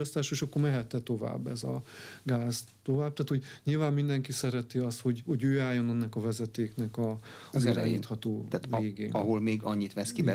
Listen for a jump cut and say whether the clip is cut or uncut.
uncut